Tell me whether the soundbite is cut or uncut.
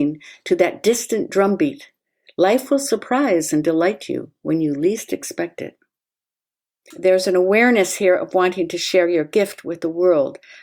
cut